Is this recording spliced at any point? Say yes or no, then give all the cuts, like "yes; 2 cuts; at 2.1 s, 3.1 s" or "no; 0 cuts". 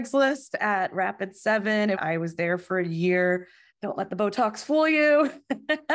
yes; 2 cuts; at 1.9 s, 3.7 s